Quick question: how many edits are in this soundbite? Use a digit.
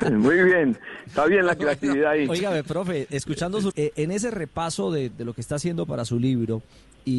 2